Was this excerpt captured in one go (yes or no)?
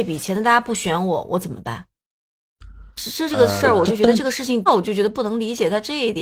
no